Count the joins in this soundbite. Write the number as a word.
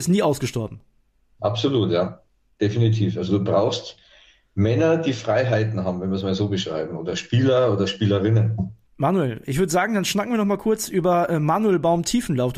zero